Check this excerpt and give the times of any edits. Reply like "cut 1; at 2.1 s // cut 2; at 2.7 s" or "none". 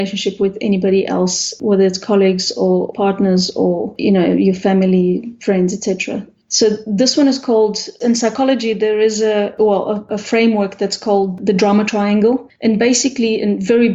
none

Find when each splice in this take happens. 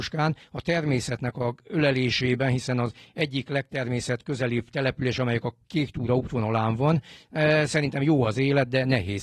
none

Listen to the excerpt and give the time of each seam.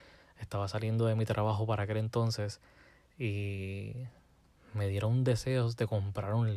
none

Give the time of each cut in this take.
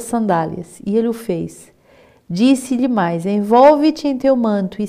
none

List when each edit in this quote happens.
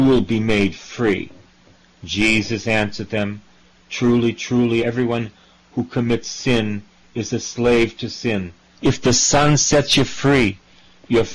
cut 1; at 4.8 s // cut 2; at 8.7 s

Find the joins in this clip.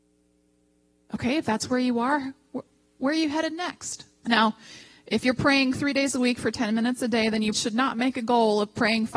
cut 1; at 4.2 s // cut 2; at 7.5 s

